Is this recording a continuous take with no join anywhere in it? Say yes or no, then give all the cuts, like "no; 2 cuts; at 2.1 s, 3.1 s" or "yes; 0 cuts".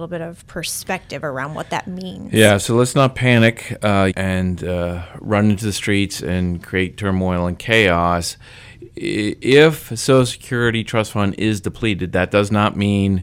no; 1 cut; at 4.1 s